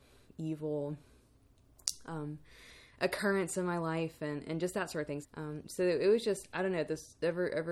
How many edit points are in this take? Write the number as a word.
one